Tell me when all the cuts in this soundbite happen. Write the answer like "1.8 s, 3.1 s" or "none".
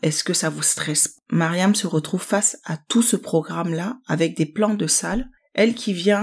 none